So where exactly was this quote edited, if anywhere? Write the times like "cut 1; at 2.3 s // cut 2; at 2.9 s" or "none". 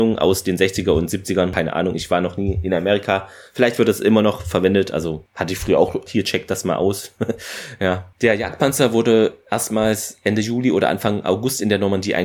cut 1; at 6.1 s